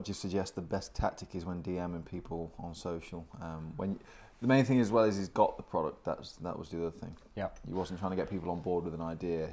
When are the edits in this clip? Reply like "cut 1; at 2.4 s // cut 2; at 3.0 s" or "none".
none